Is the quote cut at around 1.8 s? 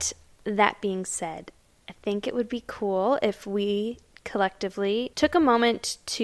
no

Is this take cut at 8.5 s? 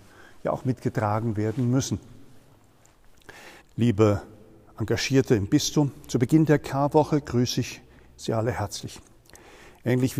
no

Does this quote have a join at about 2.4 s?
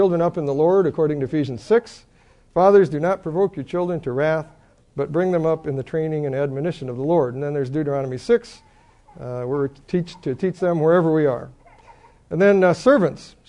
no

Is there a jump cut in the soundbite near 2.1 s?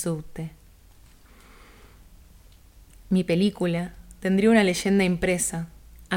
no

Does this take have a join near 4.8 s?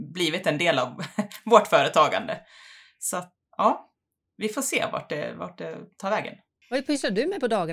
no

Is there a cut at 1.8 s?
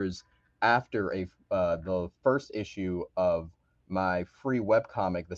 no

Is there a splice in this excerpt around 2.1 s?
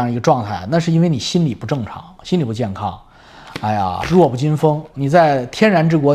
no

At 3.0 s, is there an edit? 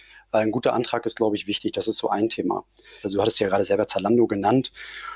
yes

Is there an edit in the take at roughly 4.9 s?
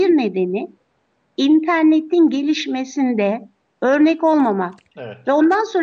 yes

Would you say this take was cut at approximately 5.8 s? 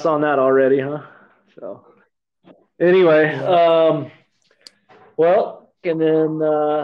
yes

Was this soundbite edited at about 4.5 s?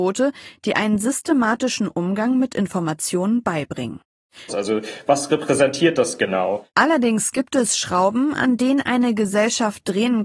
yes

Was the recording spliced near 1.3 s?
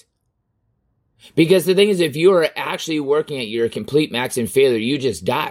no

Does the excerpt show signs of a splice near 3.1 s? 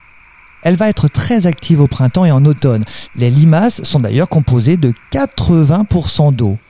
yes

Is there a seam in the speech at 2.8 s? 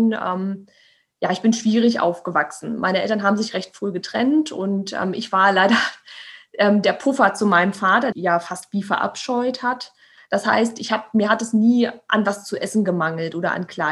no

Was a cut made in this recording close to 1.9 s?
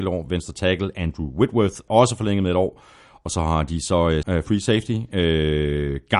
yes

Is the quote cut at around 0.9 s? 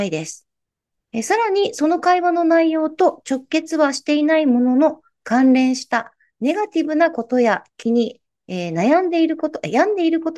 yes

